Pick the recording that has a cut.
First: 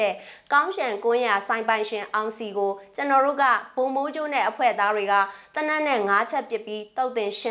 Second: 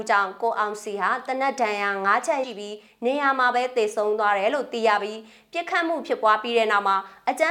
second; 1 cut; at 2.4 s

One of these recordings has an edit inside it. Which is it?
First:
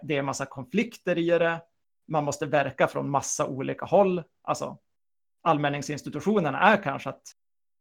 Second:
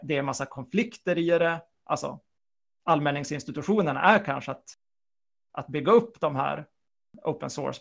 second; 1 cut; at 1.7 s

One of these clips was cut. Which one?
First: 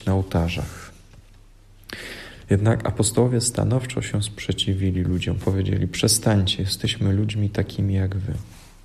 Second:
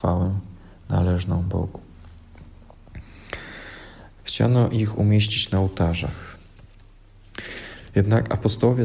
second; 1 cut; at 4.2 s

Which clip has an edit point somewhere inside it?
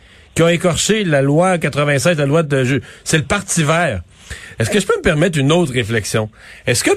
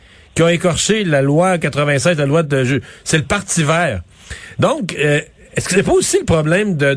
first; 1 cut; at 4.6 s

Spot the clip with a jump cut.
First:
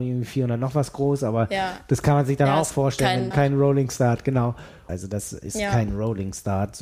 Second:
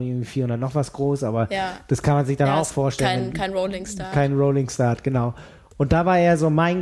first; 2 cuts; at 3.3 s, 4.9 s

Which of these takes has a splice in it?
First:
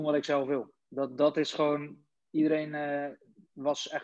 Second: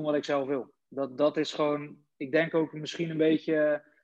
first; 1 cut; at 2.2 s

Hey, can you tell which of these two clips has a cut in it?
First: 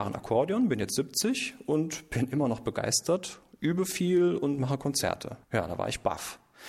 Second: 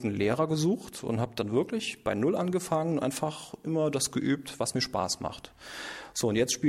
first; 1 cut; at 5.4 s

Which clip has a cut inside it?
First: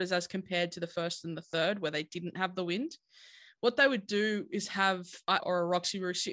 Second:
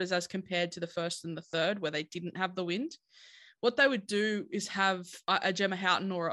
first; 1 cut; at 5.4 s

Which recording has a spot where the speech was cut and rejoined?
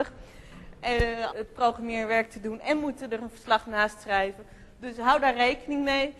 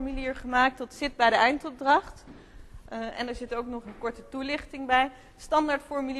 first; 1 cut; at 1.3 s

